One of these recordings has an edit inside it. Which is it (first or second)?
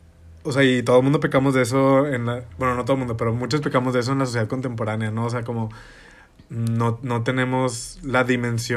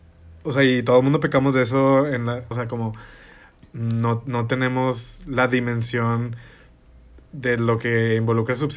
second